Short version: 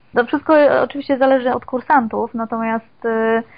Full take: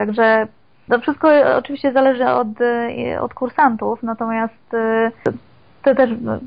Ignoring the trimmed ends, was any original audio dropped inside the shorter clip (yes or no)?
yes